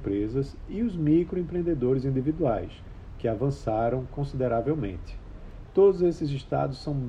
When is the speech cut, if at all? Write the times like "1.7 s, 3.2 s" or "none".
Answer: 5.7 s